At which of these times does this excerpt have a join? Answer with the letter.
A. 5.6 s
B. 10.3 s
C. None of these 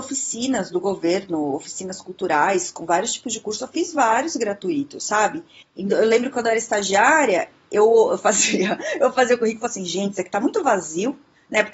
A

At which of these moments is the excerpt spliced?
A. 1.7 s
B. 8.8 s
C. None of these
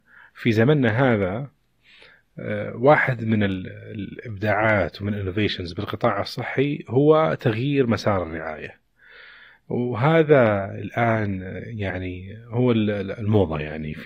C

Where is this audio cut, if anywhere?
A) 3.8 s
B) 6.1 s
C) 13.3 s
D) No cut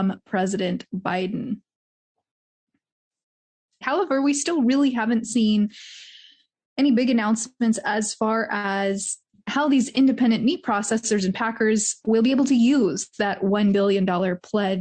A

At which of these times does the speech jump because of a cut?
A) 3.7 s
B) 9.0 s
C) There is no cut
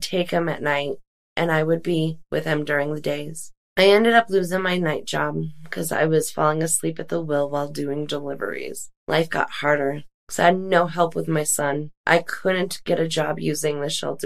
A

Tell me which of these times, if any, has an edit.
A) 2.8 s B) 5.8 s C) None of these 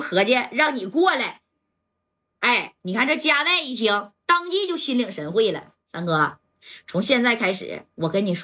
B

